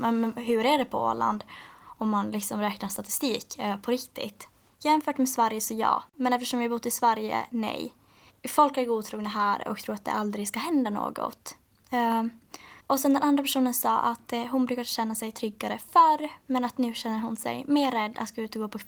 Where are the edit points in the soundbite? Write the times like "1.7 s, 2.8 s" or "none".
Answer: 4.7 s, 8.3 s, 12.8 s